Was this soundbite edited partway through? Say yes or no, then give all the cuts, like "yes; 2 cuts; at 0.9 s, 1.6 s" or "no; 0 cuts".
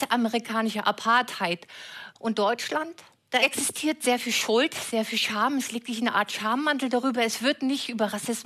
yes; 1 cut; at 2.2 s